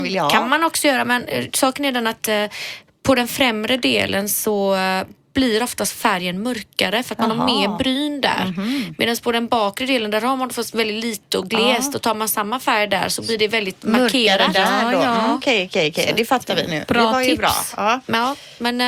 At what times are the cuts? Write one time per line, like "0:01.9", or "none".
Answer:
none